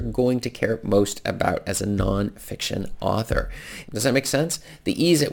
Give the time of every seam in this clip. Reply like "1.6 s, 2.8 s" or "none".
3.8 s